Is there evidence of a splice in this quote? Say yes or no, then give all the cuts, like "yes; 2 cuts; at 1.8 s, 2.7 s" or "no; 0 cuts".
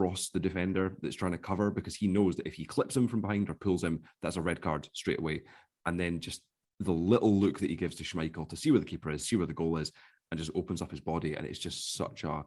no; 0 cuts